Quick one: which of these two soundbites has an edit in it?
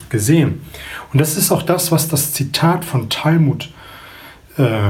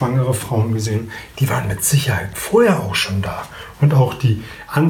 second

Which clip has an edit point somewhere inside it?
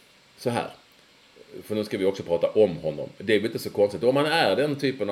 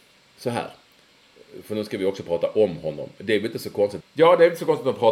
second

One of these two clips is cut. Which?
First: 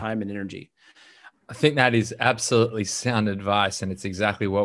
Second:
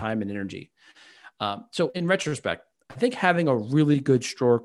first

